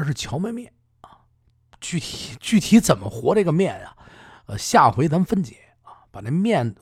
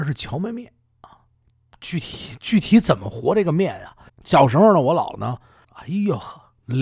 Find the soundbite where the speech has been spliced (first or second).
second